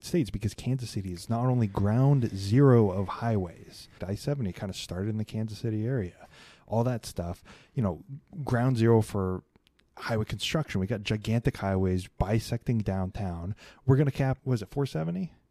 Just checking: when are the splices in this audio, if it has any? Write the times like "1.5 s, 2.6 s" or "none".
4.0 s, 14.4 s